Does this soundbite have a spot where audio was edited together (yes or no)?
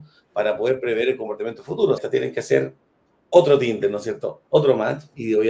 yes